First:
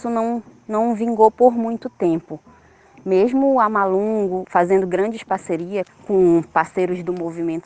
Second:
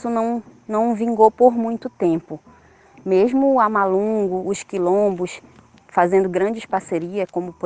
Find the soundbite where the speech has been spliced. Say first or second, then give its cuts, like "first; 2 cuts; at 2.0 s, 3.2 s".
first; 2 cuts; at 4.4 s, 5.9 s